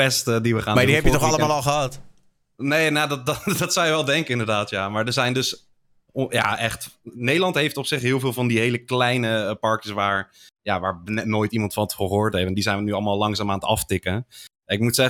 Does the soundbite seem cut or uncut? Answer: uncut